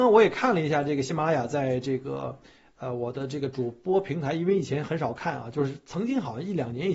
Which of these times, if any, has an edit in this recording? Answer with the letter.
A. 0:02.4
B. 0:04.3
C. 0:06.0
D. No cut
D